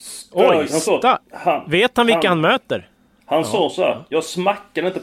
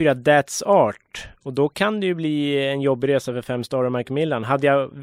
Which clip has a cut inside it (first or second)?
first